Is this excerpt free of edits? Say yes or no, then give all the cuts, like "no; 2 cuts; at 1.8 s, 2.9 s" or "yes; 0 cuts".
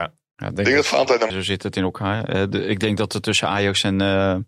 no; 1 cut; at 1.3 s